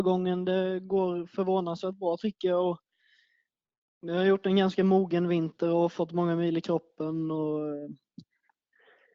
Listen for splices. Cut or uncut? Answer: uncut